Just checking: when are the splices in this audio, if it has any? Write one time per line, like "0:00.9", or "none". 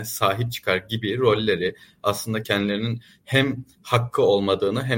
0:02.4

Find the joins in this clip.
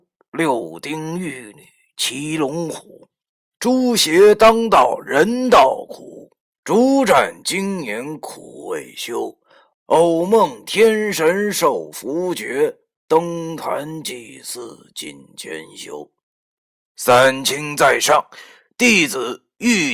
none

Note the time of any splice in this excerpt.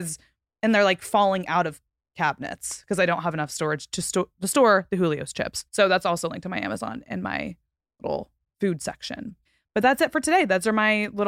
0:05.7

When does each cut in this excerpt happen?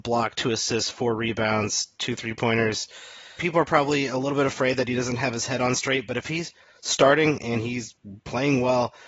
0:03.4

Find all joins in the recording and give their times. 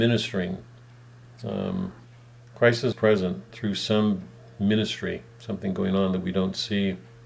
0:02.9
0:05.3

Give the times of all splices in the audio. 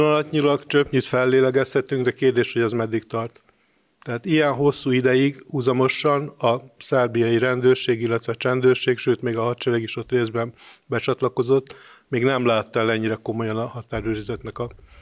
none

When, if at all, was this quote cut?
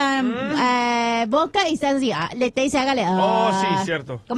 none

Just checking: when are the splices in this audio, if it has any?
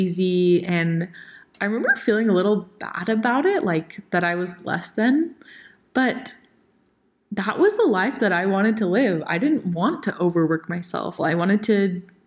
0:11.2

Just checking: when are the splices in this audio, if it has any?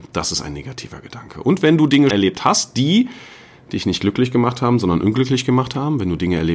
0:02.1

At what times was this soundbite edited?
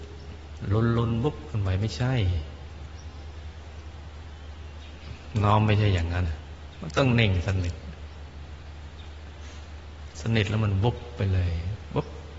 0:06.2

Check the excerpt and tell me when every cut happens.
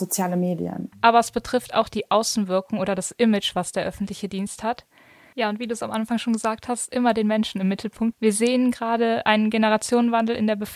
0:00.9
0:05.3
0:08.1

